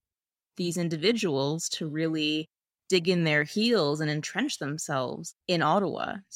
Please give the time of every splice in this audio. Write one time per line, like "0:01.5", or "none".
0:05.4